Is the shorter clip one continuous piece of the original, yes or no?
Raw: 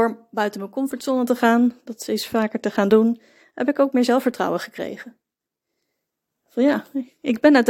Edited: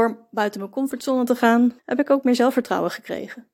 no